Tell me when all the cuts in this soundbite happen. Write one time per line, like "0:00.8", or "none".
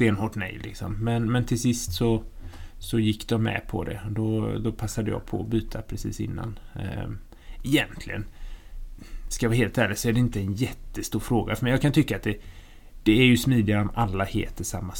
none

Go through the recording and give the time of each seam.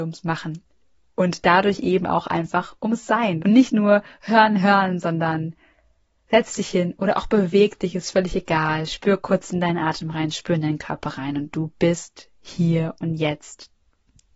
0:03.4
0:04.6

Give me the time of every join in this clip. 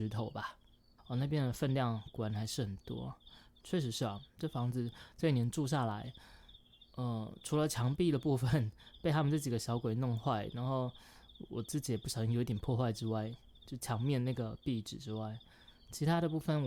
0:01.0
0:03.6

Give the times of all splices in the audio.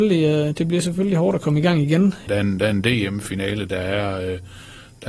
0:02.3

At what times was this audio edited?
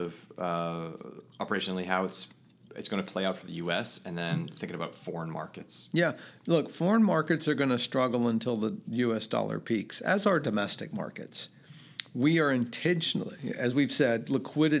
none

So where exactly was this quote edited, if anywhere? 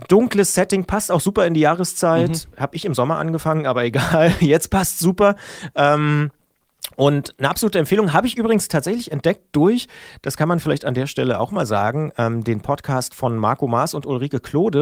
none

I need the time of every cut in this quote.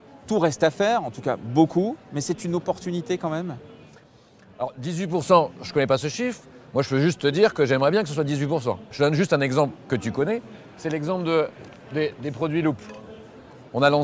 0:08.9

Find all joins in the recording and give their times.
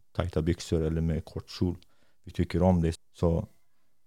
0:03.0

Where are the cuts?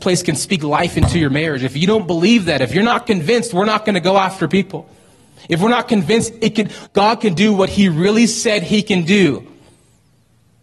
none

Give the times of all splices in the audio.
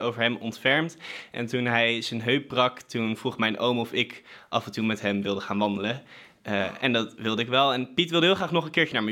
none

